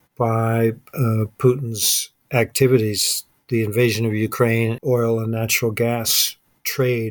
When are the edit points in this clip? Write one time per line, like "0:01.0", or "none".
0:04.8

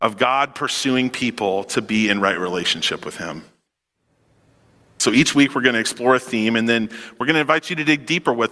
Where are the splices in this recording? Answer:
none

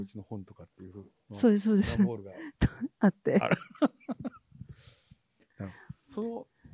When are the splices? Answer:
none

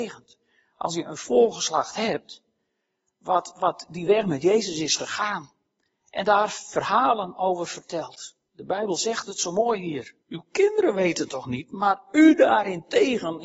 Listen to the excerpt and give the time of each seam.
0:08.5
0:10.2

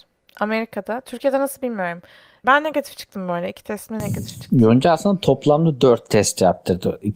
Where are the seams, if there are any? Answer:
0:02.4

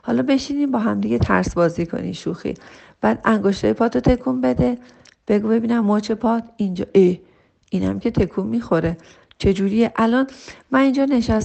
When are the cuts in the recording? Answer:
none

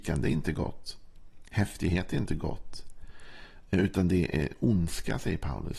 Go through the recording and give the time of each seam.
none

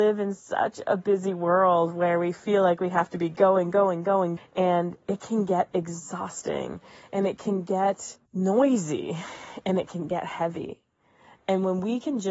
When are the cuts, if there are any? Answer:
0:04.4
0:08.3

